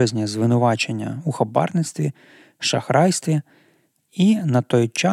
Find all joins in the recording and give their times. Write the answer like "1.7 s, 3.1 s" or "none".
none